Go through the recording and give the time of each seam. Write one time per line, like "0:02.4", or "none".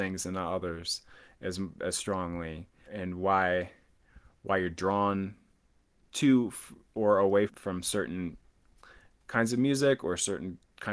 0:02.9
0:07.5